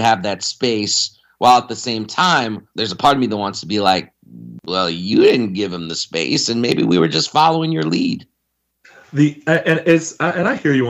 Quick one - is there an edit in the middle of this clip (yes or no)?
yes